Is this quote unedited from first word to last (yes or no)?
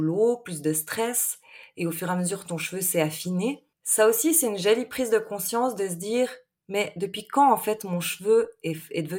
no